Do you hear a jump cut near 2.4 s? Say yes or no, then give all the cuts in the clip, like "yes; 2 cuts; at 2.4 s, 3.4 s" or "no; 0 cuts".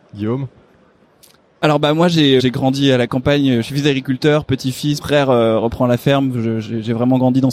yes; 2 cuts; at 2.4 s, 5.0 s